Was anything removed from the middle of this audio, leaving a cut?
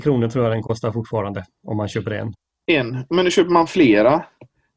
no; 0 cuts

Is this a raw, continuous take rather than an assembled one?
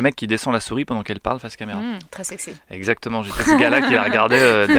yes; 0 cuts

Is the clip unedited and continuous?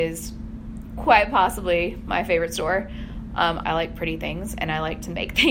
no; 1 cut; at 3.6 s

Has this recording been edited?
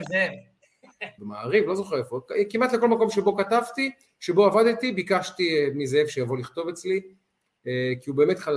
yes; 1 cut; at 1.2 s

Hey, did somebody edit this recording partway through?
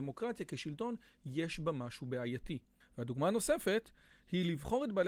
yes; 1 cut; at 2.8 s

